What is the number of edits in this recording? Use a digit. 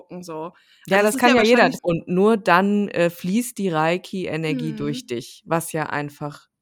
1